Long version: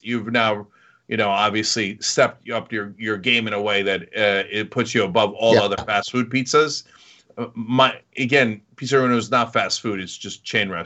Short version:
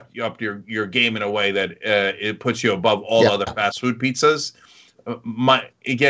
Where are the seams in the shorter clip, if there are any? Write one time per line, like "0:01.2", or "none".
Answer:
none